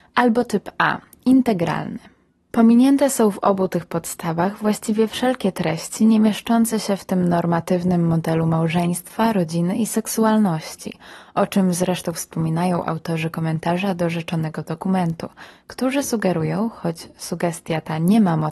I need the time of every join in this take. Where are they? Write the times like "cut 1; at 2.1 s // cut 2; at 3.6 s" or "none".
cut 1; at 2.5 s